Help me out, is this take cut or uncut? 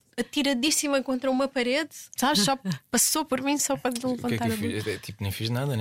cut